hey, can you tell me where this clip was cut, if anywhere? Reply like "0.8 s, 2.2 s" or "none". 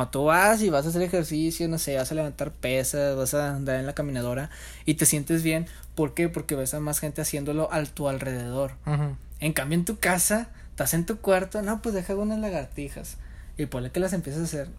none